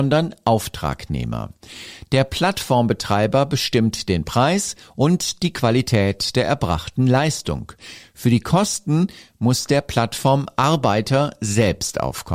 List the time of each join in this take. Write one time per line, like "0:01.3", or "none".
none